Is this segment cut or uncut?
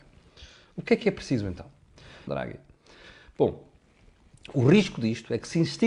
cut